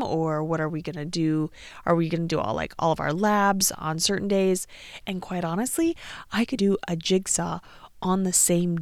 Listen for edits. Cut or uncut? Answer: cut